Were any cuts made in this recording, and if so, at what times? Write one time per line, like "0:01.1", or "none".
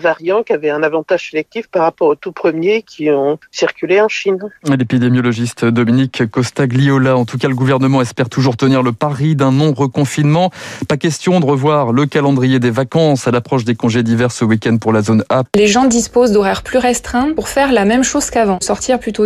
0:15.4

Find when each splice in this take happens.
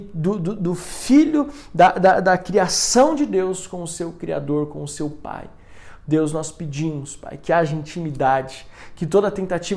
none

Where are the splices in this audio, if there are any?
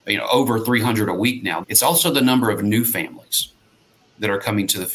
0:01.6

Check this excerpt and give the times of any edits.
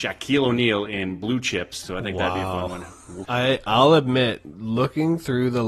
0:01.8
0:03.2

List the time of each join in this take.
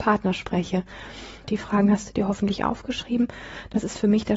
0:01.4

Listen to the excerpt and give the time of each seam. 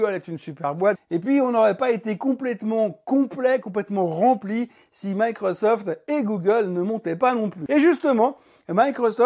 0:00.9

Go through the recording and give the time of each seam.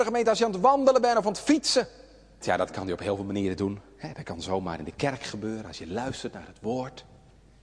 0:02.4

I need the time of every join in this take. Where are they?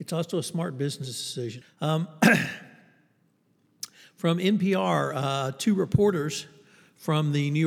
0:01.6

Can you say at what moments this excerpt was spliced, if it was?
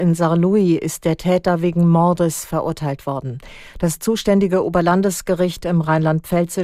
none

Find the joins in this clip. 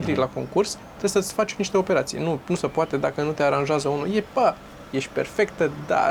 none

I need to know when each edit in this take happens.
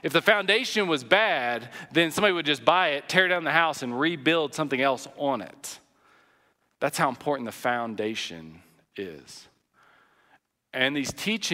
none

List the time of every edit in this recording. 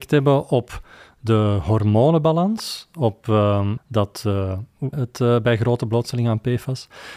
0:03.8
0:04.9

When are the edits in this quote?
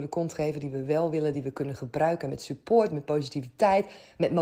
none

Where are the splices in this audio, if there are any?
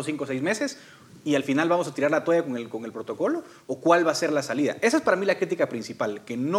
none

